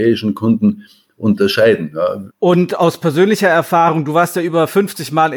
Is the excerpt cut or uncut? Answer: cut